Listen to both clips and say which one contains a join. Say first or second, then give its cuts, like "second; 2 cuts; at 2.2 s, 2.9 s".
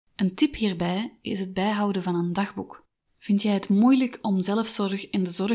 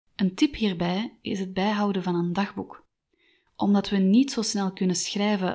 first; 1 cut; at 3.1 s